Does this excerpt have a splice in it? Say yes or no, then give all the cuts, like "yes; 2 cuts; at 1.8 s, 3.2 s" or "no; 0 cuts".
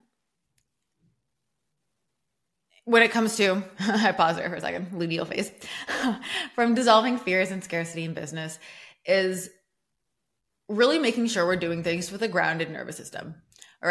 no; 0 cuts